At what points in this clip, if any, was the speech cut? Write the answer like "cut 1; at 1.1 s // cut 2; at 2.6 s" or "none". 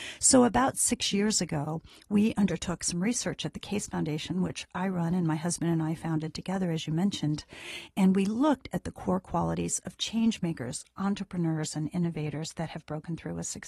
none